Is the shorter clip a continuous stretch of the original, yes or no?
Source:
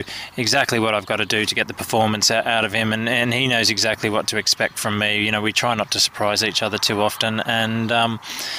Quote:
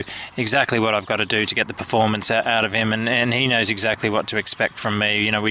yes